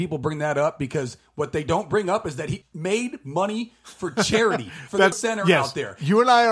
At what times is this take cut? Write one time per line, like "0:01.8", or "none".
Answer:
0:05.1